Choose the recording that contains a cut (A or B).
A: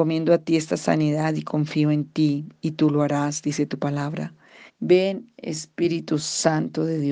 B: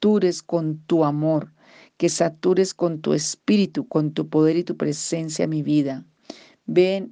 A